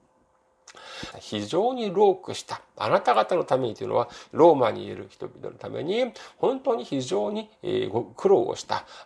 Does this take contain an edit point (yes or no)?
yes